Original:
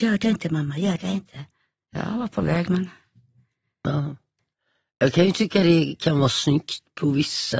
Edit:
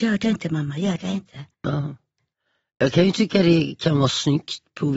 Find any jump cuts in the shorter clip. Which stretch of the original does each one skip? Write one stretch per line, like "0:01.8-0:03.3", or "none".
0:01.5-0:03.7